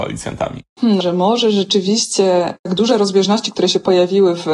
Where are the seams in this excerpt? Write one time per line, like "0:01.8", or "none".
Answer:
0:01.0